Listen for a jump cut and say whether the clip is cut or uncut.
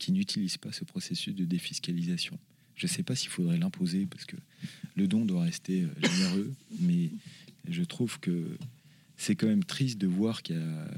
uncut